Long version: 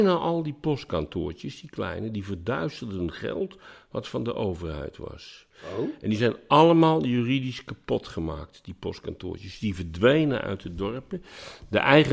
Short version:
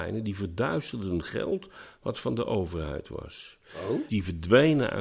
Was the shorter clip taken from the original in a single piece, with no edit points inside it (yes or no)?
no